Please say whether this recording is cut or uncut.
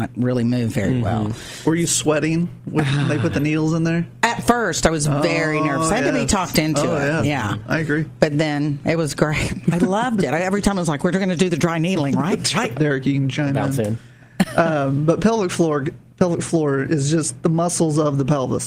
cut